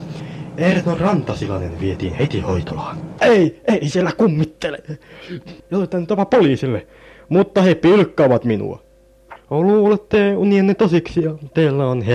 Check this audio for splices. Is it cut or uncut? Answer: cut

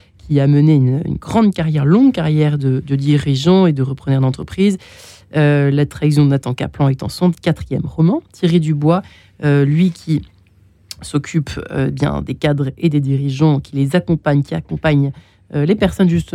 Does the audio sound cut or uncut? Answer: uncut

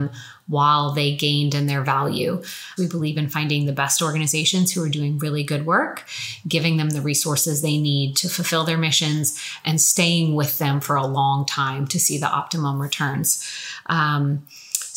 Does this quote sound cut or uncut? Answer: cut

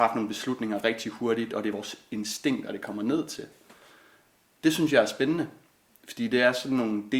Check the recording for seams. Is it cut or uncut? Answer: uncut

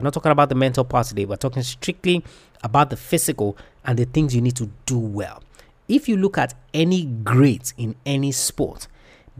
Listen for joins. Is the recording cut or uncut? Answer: uncut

